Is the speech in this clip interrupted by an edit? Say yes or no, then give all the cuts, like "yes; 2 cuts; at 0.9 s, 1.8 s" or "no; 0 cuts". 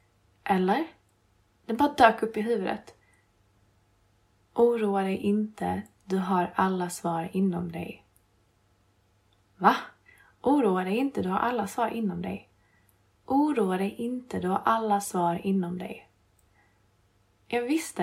yes; 1 cut; at 1.6 s